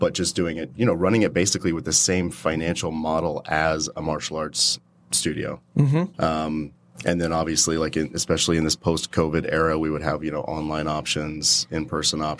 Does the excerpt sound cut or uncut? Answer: cut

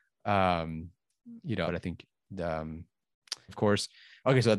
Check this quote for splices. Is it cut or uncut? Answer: cut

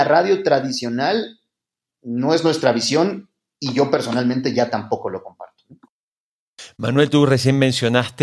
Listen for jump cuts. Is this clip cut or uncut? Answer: uncut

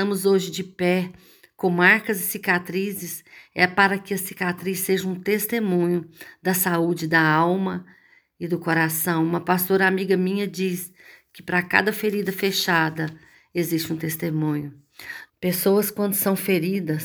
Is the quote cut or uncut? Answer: cut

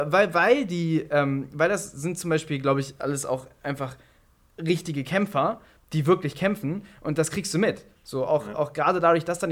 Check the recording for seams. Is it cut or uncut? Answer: uncut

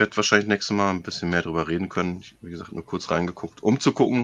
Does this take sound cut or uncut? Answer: uncut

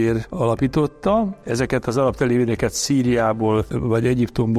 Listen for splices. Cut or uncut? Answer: uncut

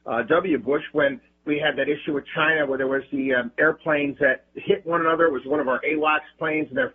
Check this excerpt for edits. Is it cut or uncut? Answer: uncut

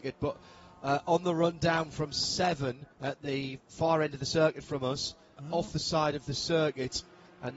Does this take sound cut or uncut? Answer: cut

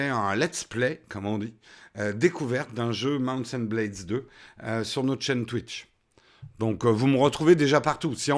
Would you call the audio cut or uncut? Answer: uncut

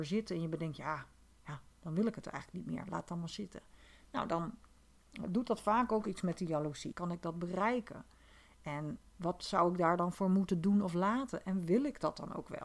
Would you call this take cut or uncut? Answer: cut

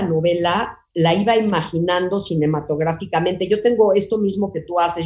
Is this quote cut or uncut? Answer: uncut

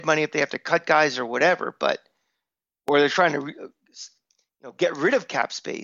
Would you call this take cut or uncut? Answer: uncut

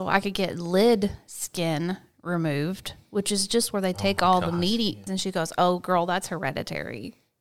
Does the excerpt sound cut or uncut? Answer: cut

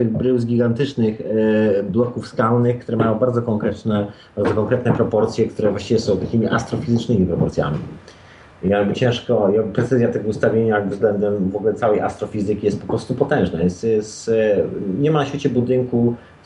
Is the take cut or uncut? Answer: uncut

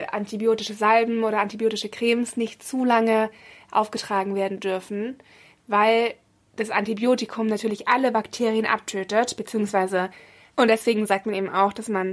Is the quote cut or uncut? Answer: cut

